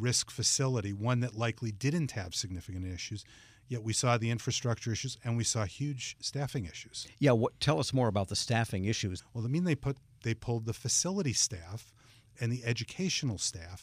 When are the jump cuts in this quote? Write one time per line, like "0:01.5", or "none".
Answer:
0:09.2